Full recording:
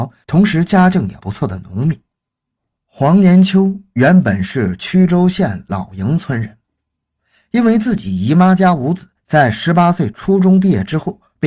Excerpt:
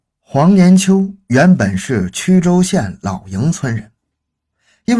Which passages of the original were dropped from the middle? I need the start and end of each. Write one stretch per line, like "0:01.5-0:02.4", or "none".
none